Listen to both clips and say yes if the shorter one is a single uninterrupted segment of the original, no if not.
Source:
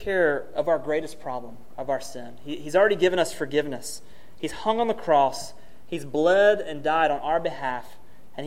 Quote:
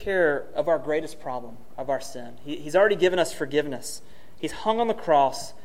yes